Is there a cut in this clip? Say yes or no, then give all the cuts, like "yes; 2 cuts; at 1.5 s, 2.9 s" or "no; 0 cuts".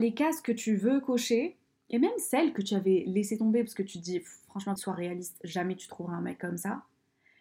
yes; 1 cut; at 4.8 s